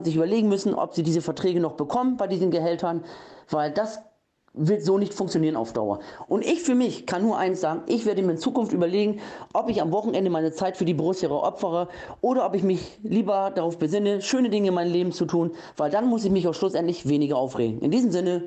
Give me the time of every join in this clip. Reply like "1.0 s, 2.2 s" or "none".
6.3 s